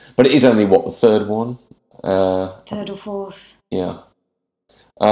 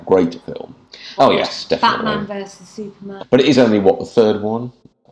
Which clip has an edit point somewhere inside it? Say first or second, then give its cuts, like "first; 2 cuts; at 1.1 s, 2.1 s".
second; 2 cuts; at 1.2 s, 3.2 s